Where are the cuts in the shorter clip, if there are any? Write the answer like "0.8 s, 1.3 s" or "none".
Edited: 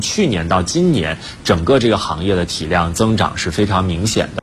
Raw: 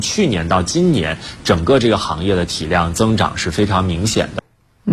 none